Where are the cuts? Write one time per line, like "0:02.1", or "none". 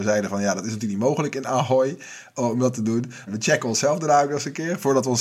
0:03.3